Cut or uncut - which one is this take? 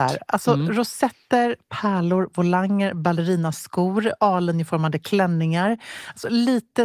uncut